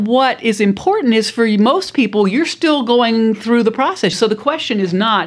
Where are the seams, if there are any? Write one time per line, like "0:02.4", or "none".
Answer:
0:04.1